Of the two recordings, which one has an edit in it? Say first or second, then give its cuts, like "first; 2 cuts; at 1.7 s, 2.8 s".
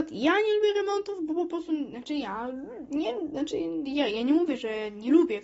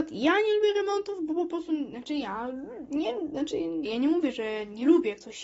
second; 1 cut; at 3.9 s